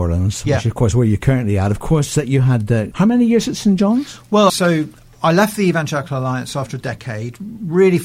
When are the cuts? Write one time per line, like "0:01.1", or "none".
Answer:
0:02.9
0:04.5